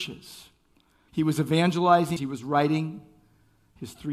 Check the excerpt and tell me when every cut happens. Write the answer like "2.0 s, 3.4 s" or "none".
1.1 s, 2.2 s